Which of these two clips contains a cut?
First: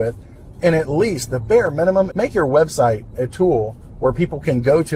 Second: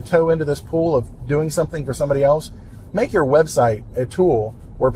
first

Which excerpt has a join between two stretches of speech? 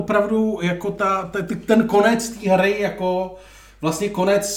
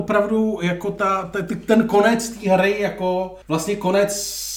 second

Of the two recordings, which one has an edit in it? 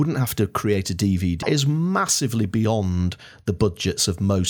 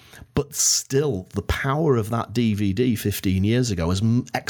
first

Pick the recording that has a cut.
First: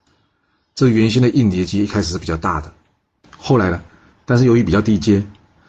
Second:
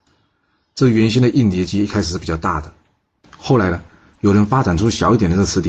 first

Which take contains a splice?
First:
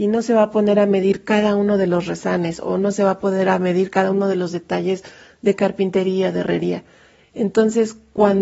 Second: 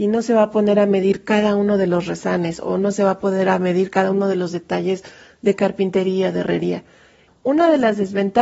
second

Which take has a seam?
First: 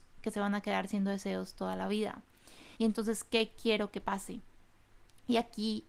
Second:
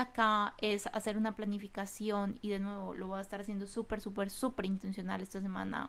first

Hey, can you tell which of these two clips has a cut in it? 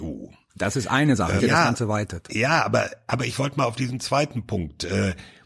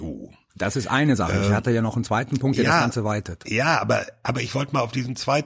first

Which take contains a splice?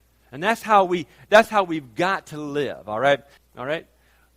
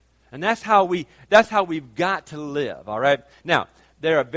first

